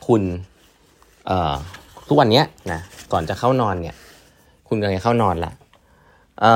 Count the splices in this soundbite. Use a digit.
1